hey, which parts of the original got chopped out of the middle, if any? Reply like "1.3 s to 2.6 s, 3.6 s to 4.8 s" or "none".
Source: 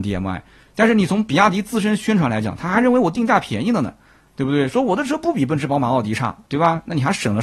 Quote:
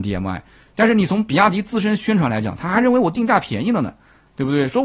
none